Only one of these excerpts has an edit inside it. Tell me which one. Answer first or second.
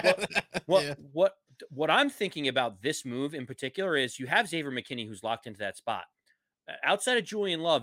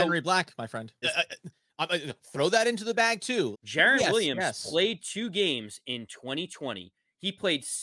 second